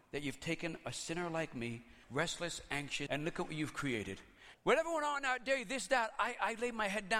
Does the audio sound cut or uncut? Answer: cut